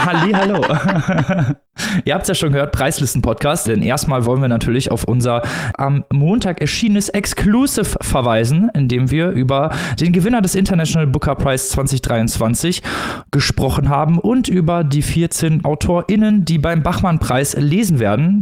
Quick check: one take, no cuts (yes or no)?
no